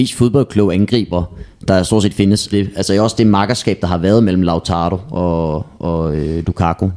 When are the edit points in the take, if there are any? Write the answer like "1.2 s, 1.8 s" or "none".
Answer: 2.5 s